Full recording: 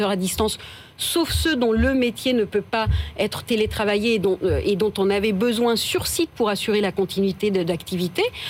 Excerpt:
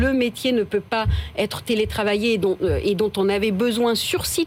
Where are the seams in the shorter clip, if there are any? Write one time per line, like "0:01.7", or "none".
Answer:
none